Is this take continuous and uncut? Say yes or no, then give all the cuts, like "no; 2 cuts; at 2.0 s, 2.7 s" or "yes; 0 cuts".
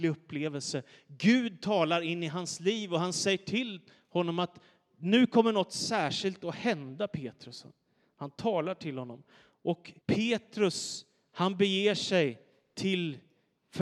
no; 1 cut; at 10.0 s